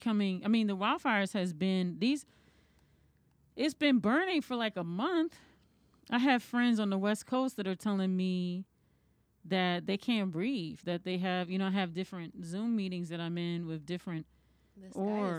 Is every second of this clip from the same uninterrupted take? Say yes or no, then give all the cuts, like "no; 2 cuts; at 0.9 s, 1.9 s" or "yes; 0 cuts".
yes; 0 cuts